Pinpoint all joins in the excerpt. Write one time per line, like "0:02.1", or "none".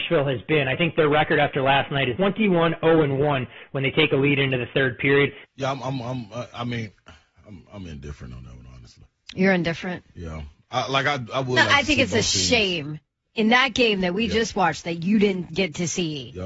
0:02.1
0:05.4